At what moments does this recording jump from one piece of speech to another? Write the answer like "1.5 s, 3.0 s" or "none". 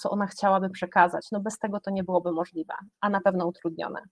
none